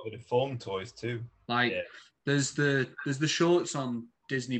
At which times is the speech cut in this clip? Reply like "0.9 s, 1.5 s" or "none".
1.5 s